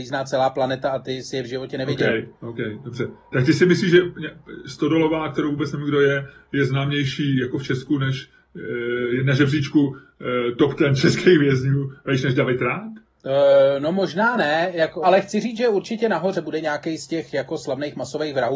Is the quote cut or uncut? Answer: cut